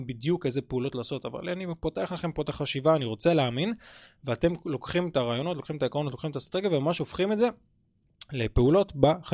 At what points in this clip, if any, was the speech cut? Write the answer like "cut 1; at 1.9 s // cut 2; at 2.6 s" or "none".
none